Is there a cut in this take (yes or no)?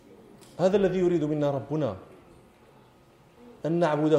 no